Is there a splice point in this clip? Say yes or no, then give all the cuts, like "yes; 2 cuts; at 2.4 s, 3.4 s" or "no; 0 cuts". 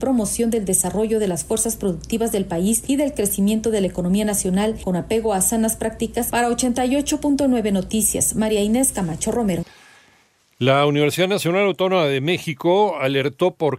no; 0 cuts